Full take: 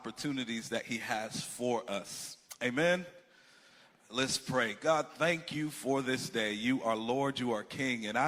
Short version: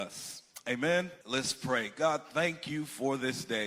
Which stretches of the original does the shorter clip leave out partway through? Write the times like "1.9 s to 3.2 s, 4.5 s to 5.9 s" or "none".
3.2 s to 4.1 s